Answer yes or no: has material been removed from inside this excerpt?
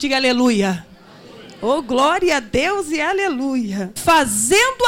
yes